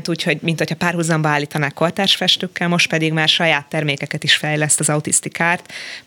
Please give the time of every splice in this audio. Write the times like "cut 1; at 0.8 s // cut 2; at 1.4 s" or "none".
none